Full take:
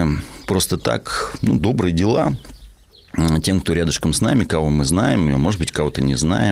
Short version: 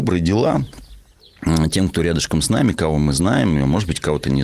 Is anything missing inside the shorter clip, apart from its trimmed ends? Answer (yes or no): no